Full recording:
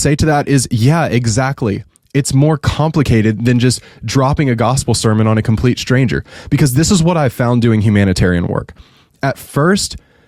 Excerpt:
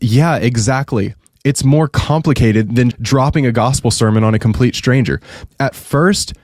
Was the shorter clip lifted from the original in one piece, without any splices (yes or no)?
no